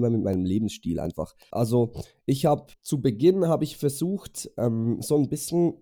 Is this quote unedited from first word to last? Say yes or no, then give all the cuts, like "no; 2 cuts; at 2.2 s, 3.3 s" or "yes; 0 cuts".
no; 1 cut; at 1.5 s